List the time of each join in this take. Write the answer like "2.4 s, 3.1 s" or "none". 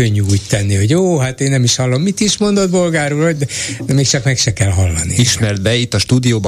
none